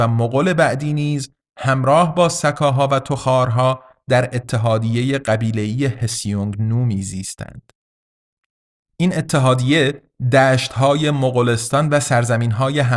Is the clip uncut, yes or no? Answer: yes